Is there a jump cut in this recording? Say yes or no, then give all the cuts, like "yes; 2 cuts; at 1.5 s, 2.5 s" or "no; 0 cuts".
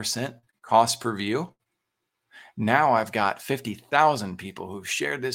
no; 0 cuts